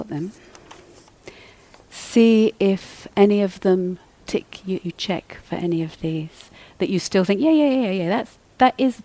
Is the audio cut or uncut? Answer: cut